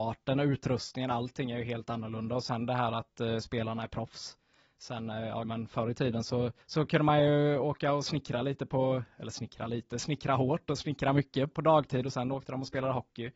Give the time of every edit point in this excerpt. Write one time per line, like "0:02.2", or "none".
0:05.4
0:06.6
0:11.5